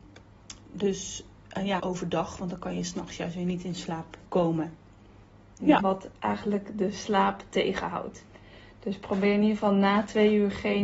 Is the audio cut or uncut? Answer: cut